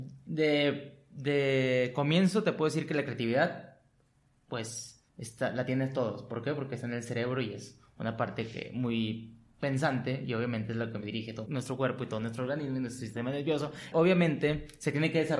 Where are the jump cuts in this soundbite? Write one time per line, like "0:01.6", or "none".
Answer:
0:05.1
0:11.5
0:13.9